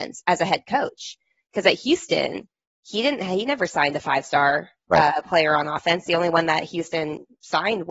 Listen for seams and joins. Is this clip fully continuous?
yes; 0 cuts

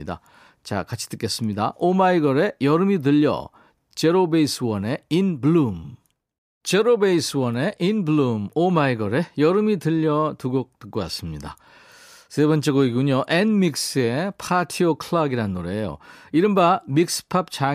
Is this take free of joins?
yes; 0 cuts

